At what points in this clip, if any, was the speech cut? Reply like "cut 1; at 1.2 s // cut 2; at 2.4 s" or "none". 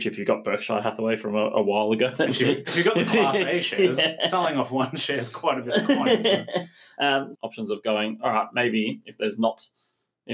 cut 1; at 7.3 s